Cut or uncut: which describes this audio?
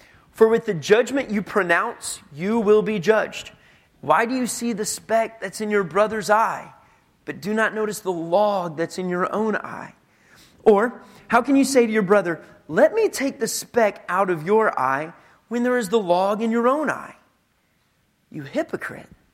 cut